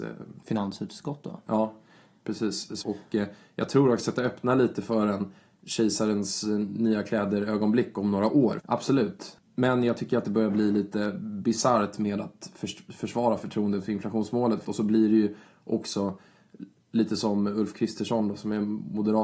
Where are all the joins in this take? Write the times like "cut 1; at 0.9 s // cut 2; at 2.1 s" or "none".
cut 1; at 2.8 s // cut 2; at 8.6 s // cut 3; at 14.6 s